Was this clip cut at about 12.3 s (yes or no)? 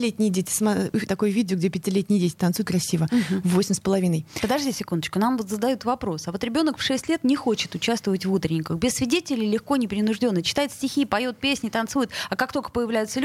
no